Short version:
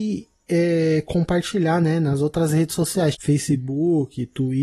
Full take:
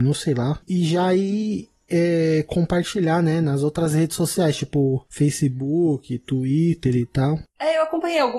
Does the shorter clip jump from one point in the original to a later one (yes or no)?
yes